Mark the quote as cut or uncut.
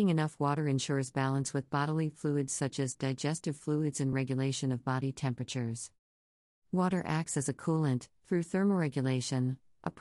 cut